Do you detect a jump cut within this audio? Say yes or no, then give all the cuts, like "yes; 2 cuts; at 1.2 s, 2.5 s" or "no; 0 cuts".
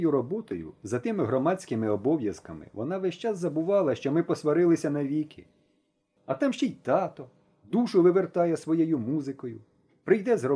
no; 0 cuts